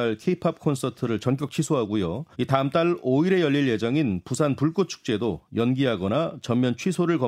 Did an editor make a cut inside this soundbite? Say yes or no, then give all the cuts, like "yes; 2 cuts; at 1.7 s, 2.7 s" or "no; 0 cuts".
yes; 1 cut; at 2.3 s